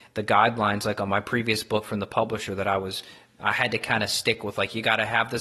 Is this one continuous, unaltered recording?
yes; 0 cuts

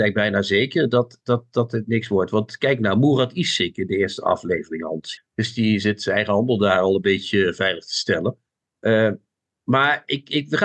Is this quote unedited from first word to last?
no; 1 cut; at 5.2 s

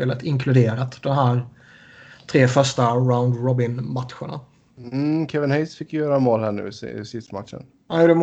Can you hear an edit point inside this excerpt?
no; 0 cuts

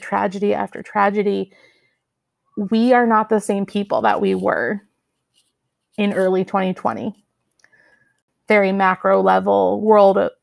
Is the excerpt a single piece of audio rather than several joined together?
yes; 0 cuts

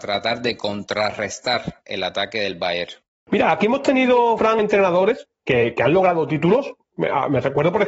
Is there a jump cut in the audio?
no; 0 cuts

